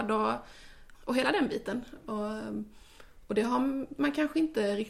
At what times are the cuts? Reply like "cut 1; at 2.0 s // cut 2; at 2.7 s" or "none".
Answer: cut 1; at 0.9 s